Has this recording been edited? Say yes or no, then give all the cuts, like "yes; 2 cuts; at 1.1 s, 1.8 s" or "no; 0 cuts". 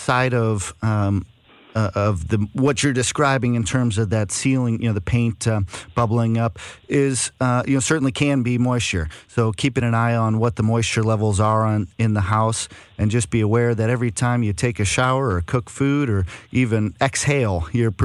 no; 0 cuts